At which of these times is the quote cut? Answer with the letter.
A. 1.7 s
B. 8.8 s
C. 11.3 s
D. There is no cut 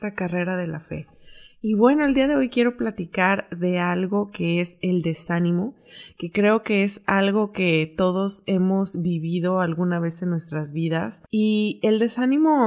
C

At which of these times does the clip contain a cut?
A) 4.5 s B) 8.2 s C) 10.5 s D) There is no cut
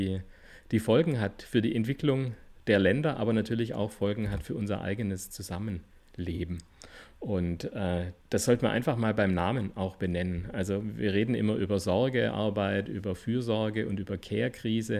B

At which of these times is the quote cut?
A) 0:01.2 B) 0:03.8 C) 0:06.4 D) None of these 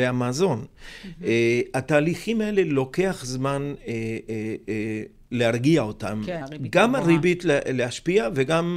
C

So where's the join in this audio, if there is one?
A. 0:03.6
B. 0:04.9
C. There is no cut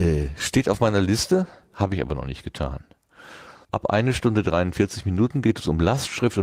A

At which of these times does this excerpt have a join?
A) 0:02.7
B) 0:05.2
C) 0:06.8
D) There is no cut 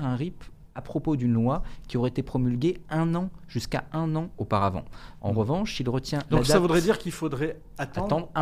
B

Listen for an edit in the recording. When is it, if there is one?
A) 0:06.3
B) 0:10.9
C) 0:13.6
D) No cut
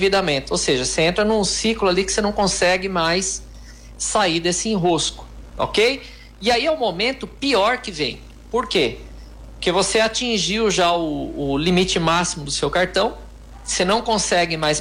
D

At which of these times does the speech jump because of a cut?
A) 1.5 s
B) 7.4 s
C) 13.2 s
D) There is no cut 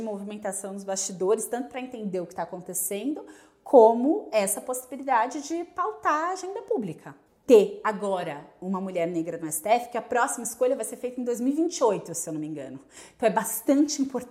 B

